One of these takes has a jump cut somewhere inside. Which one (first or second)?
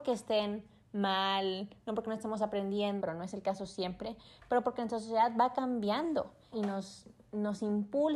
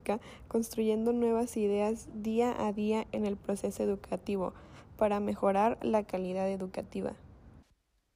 first